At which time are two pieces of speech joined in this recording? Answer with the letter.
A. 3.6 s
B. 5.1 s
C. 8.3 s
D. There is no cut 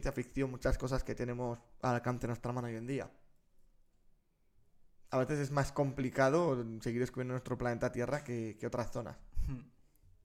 B